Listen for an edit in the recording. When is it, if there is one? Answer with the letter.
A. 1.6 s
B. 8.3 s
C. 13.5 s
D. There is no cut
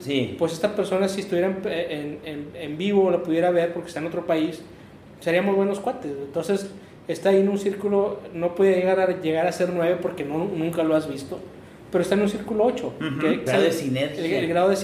C